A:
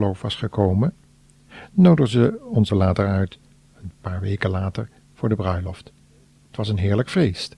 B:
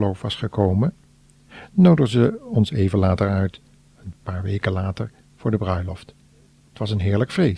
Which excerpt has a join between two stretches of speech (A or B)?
A